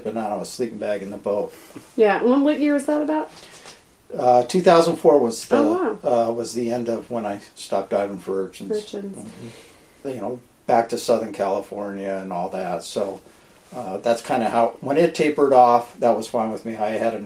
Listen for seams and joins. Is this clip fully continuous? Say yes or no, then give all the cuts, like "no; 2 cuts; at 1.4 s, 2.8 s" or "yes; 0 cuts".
no; 1 cut; at 10.0 s